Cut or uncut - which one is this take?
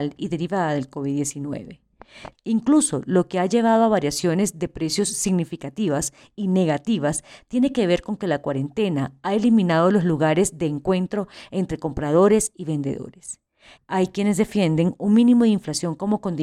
cut